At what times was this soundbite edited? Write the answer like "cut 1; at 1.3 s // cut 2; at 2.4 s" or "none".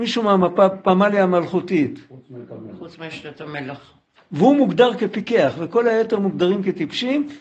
cut 1; at 4.2 s